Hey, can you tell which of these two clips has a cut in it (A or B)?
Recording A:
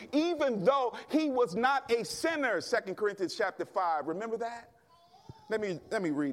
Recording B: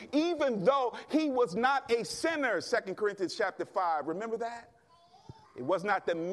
B